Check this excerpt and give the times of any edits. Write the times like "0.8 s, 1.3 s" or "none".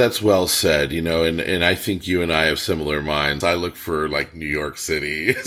3.4 s